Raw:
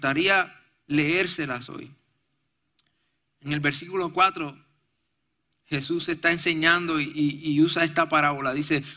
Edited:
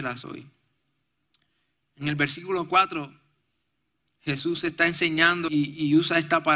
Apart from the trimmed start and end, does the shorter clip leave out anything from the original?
yes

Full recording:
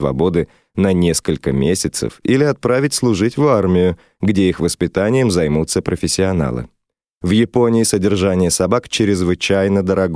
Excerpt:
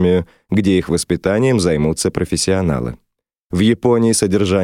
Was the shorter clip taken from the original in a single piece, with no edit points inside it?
yes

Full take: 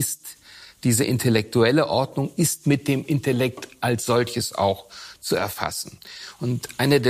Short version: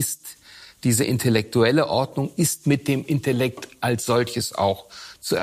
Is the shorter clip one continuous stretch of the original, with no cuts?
yes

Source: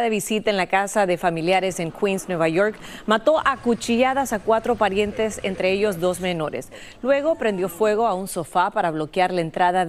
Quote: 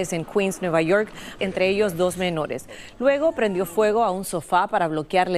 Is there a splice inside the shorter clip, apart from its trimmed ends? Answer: yes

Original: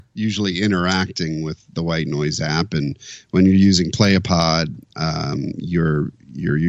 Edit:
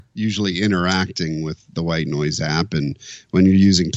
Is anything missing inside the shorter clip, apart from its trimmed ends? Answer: no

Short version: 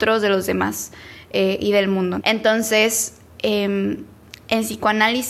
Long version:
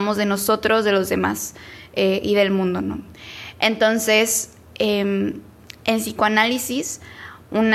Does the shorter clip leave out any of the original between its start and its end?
yes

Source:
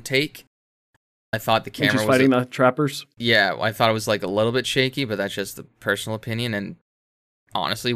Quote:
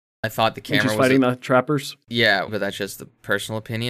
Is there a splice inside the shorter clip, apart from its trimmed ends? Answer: yes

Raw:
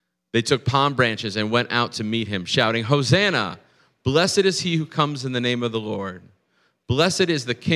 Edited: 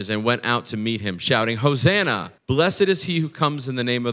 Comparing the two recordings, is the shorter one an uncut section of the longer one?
no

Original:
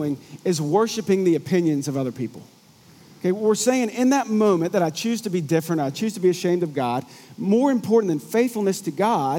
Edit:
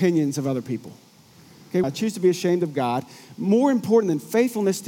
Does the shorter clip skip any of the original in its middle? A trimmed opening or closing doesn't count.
yes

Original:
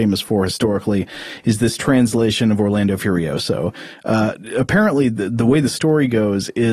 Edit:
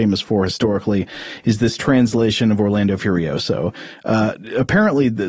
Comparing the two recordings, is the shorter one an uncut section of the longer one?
yes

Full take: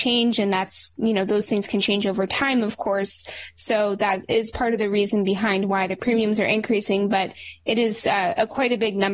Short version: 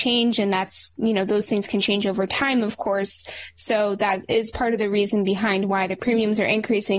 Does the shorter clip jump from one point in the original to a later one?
no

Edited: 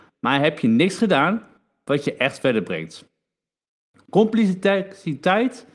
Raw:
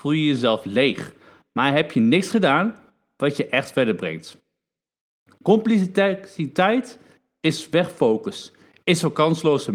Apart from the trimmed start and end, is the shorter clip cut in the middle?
no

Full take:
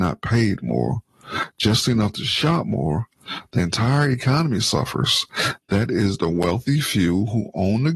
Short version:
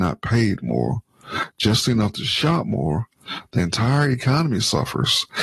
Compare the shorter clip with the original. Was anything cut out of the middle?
no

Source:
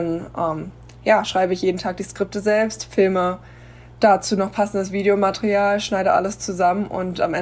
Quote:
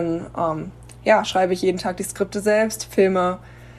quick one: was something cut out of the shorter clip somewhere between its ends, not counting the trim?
no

